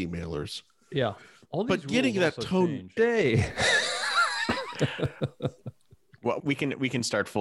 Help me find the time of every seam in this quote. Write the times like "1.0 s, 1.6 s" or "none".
3.0 s, 6.4 s